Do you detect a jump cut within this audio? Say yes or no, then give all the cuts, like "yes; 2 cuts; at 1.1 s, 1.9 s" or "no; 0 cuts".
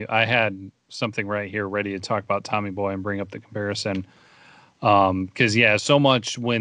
no; 0 cuts